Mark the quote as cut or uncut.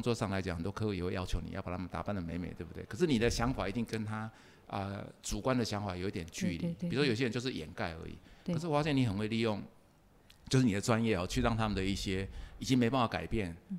uncut